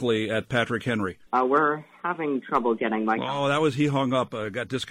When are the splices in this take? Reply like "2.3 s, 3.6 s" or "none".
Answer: 1.3 s